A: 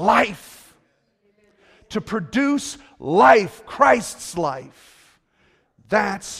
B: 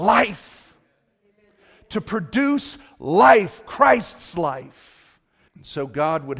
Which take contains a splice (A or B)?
B